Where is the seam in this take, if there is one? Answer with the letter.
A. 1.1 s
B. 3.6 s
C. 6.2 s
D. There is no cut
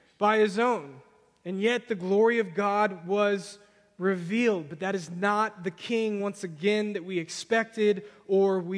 D